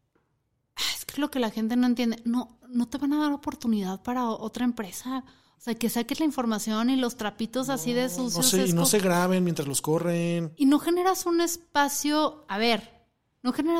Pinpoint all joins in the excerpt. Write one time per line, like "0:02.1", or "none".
none